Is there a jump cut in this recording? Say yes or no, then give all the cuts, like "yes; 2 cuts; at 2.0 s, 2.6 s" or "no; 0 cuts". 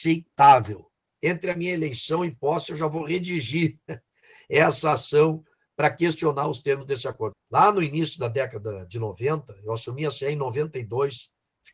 yes; 2 cuts; at 1.1 s, 7.3 s